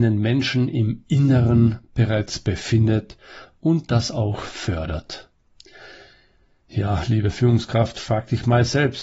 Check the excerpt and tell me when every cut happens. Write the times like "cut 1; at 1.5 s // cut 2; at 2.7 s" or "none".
none